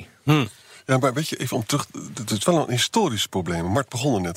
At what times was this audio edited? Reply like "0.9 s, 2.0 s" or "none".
none